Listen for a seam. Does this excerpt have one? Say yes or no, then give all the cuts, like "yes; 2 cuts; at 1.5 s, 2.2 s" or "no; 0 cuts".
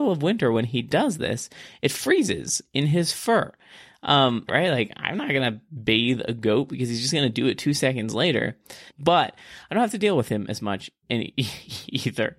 yes; 2 cuts; at 4.5 s, 8.9 s